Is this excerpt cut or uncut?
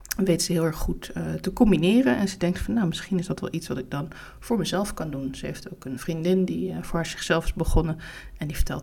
cut